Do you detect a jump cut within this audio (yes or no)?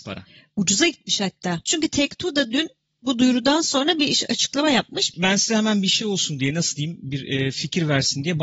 yes